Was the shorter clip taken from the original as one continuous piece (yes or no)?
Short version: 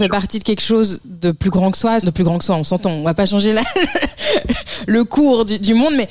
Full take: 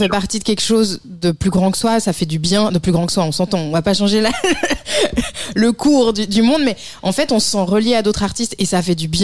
no